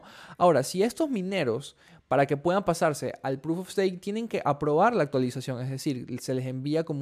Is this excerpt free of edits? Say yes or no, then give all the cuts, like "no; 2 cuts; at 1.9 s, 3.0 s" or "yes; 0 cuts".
yes; 0 cuts